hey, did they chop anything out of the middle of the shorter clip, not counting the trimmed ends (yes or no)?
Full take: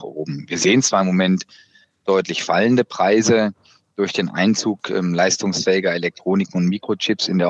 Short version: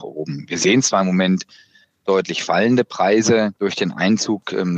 yes